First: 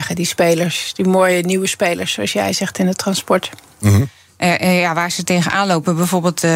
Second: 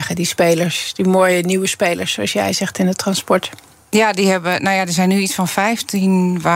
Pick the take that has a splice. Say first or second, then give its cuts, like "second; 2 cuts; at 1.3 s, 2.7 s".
first; 1 cut; at 3.8 s